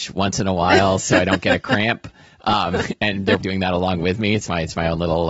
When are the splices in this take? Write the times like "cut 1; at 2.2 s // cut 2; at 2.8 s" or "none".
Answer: cut 1; at 3.4 s